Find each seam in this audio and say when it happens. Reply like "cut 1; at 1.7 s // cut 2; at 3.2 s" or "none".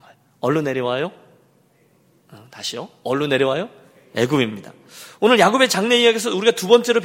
none